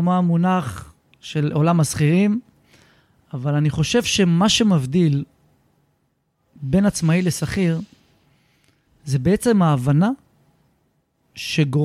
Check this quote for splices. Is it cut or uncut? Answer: uncut